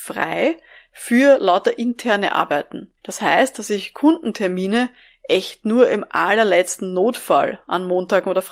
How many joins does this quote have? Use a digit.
1